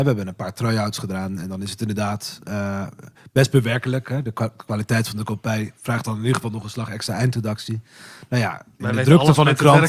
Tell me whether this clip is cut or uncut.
uncut